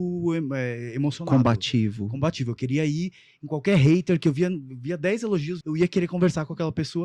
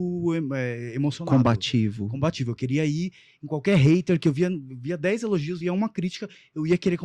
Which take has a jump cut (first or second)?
first